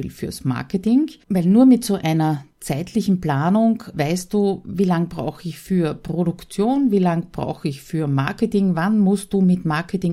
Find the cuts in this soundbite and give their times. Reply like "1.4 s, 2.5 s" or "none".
1.2 s, 3.9 s